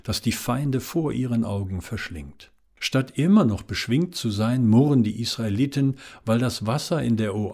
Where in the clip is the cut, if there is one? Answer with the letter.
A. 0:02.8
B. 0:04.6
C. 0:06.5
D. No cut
A